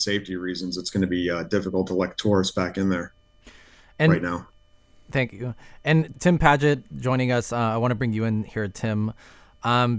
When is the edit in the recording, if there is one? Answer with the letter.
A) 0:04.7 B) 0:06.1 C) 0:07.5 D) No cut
B